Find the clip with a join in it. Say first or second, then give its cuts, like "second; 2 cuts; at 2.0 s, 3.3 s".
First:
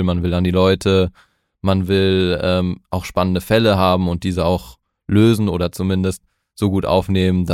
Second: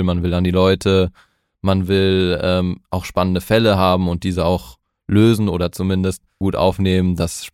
second; 1 cut; at 6.4 s